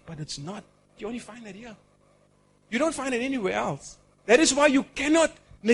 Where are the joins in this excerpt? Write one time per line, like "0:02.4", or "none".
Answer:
0:01.0
0:04.2